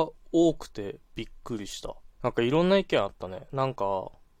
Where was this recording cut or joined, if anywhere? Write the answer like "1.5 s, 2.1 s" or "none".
2.1 s